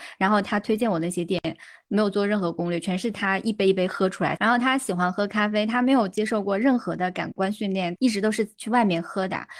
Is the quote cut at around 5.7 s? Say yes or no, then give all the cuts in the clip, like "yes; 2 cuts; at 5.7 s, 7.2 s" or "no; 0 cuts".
no; 2 cuts; at 4.4 s, 8.0 s